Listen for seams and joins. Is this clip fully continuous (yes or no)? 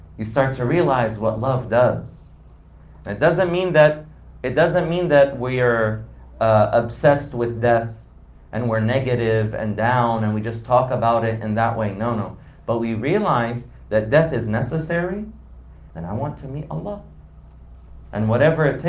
no